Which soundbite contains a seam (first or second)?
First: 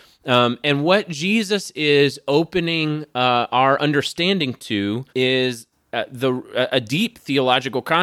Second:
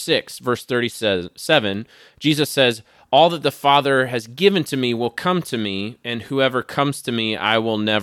first